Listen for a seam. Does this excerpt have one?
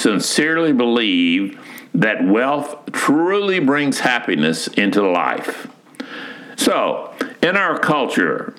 yes; 1 cut; at 6.6 s

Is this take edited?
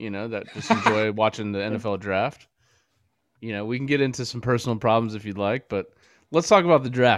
no; 0 cuts

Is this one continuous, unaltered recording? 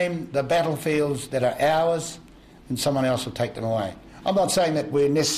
yes; 0 cuts

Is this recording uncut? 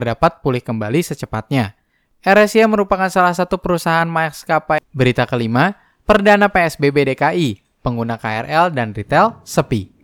no; 2 cuts; at 4.8 s, 7.8 s

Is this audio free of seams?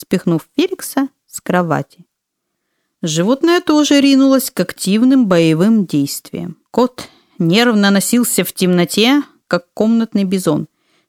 no; 1 cut; at 6.7 s

